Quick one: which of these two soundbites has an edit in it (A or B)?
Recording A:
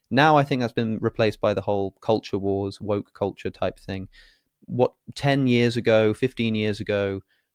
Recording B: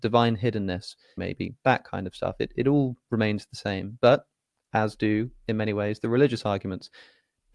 B